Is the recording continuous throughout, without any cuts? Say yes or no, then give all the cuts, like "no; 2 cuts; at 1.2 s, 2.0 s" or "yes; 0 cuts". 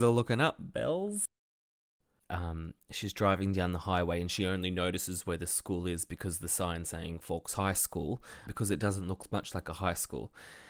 no; 2 cuts; at 2.2 s, 8.5 s